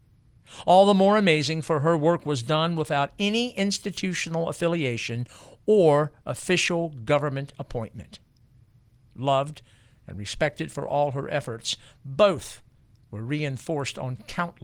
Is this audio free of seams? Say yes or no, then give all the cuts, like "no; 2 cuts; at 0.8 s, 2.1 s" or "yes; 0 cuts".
yes; 0 cuts